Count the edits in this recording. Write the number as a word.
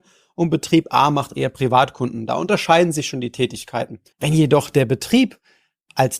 one